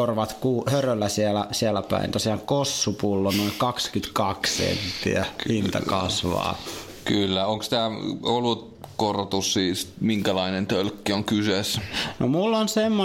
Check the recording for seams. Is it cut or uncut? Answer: uncut